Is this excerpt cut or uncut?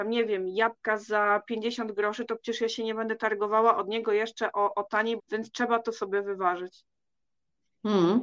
cut